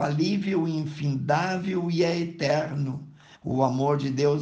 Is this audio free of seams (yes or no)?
no